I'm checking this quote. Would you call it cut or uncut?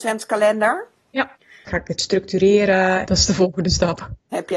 cut